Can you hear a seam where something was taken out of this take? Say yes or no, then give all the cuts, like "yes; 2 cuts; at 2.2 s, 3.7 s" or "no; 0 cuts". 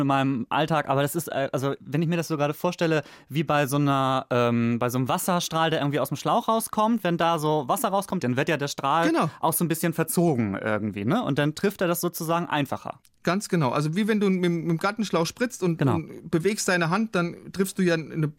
yes; 1 cut; at 8.2 s